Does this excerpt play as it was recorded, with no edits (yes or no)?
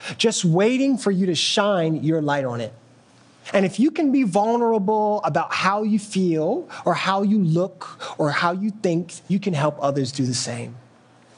no